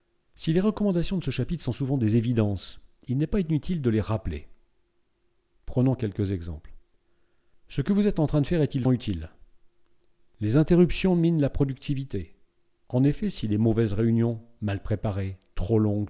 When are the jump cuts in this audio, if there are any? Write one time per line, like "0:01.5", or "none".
0:08.9
0:12.8